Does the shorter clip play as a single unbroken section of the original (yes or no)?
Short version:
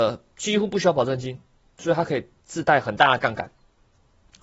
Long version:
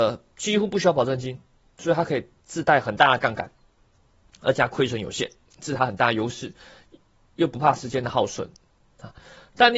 yes